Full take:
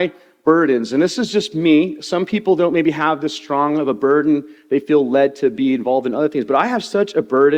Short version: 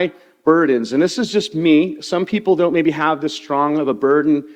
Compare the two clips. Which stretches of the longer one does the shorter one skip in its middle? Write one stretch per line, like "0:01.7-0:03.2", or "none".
none